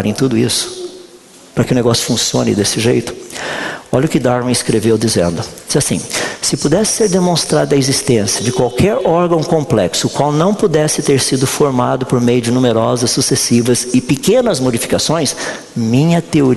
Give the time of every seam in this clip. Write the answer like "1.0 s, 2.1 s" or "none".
none